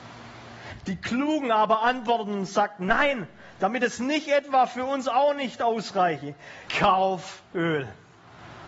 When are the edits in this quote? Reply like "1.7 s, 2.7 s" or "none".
6.7 s